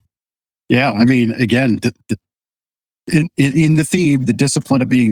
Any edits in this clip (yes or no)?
no